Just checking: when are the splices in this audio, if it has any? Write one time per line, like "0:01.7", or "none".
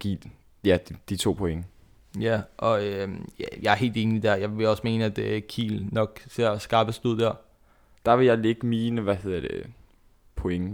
0:08.0